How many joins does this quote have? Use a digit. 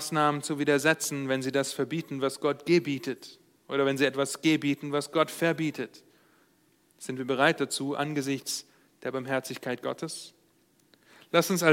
0